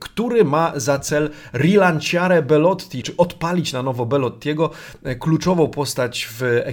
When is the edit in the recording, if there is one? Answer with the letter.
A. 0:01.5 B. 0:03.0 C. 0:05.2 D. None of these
B